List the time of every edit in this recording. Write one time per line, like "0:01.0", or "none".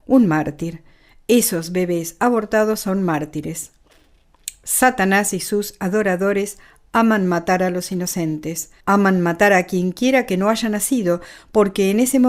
0:08.8